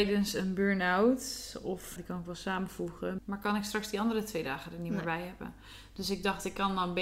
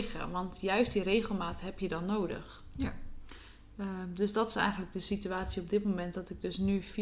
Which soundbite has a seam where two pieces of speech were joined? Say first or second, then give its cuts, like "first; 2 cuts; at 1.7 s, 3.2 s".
first; 2 cuts; at 2.0 s, 3.2 s